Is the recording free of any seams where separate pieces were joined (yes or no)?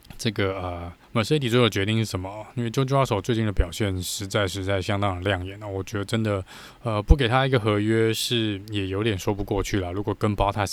no